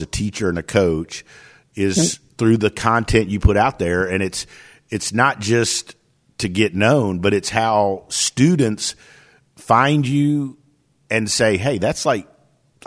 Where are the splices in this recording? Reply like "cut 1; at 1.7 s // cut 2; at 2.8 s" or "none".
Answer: none